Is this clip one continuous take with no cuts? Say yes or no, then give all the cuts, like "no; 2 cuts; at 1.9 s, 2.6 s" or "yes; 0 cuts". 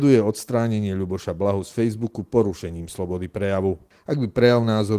no; 1 cut; at 3.9 s